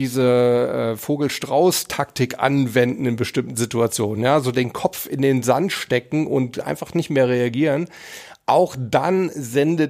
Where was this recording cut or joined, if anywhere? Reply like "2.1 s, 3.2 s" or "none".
none